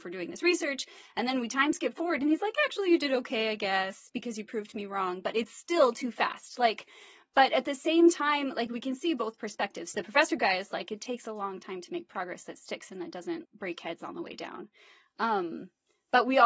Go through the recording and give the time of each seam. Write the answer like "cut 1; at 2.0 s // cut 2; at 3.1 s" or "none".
cut 1; at 9.9 s // cut 2; at 13.4 s